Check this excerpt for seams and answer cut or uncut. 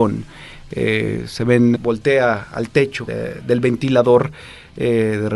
cut